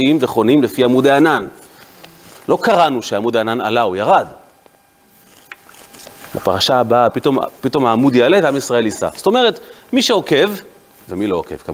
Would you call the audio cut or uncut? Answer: cut